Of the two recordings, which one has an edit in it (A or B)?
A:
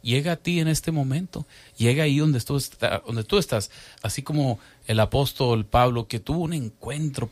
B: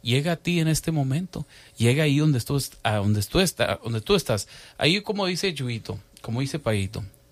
A